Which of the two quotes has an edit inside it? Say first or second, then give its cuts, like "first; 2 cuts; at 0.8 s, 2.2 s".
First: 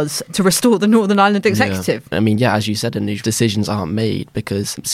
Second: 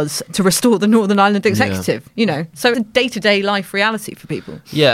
first; 2 cuts; at 2.1 s, 3.2 s